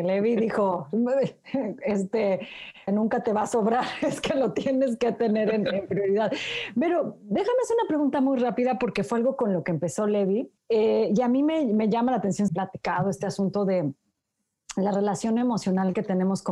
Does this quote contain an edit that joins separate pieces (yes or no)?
yes